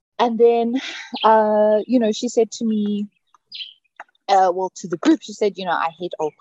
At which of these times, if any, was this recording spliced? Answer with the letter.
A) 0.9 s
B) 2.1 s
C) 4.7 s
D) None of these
D